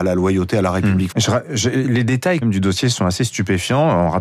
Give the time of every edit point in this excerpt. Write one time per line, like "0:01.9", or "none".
0:01.1
0:02.4